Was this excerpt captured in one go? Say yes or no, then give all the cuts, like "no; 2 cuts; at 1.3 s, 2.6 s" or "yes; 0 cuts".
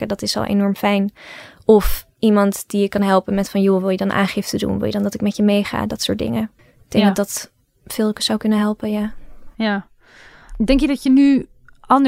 no; 1 cut; at 6.6 s